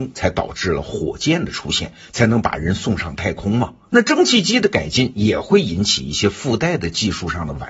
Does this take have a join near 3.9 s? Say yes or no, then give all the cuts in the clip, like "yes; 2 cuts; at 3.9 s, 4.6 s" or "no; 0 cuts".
yes; 1 cut; at 3.9 s